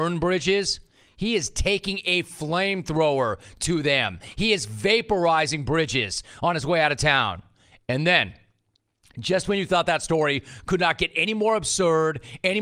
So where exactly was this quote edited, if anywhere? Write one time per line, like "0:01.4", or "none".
none